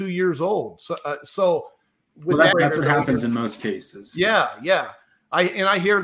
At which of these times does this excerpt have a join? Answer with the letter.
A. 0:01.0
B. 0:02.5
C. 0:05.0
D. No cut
B